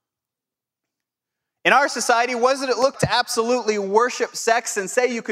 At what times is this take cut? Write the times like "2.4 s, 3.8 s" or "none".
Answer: 2.9 s